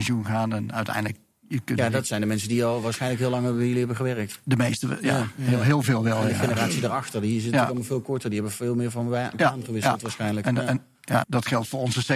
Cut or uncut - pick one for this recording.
cut